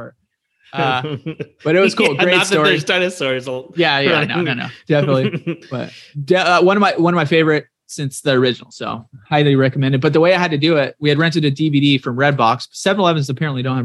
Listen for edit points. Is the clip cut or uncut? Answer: uncut